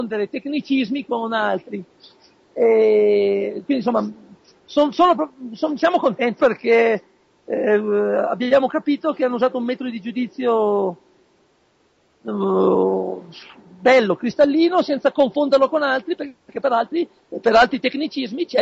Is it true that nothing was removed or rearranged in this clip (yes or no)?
no